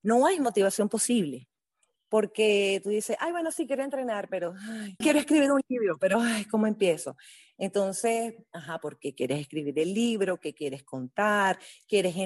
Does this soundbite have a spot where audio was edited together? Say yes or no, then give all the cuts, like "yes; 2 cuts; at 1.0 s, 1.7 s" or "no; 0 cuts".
yes; 1 cut; at 5.0 s